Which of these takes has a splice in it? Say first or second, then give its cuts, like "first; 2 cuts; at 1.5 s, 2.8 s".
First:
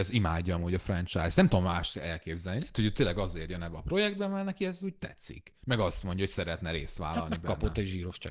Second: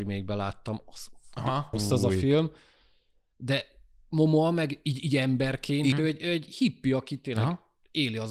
second; 2 cuts; at 1.7 s, 5.9 s